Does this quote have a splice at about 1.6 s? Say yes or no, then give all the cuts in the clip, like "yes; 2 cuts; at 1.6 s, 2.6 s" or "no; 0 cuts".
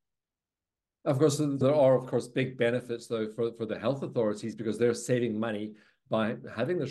yes; 1 cut; at 1.6 s